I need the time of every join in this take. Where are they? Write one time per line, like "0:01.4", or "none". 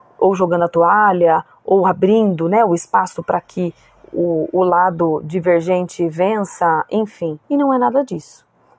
0:07.4